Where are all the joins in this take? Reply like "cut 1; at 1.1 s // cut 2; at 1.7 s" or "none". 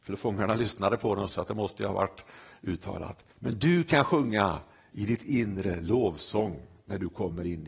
cut 1; at 1.3 s // cut 2; at 3.3 s